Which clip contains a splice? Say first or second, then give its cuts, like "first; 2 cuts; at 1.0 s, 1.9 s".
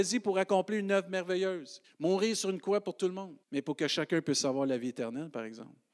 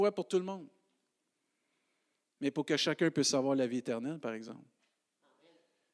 first; 2 cuts; at 1.8 s, 3.4 s